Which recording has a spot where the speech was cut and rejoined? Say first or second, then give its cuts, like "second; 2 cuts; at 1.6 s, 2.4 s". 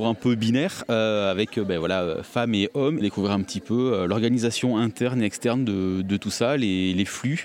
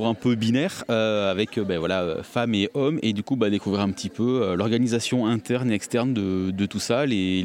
first; 1 cut; at 3.0 s